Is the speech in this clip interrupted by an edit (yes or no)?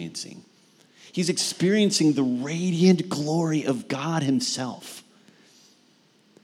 no